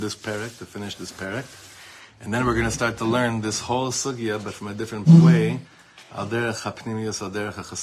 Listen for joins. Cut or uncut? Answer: uncut